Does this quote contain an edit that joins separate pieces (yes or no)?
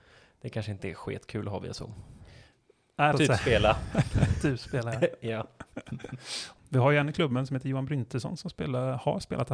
yes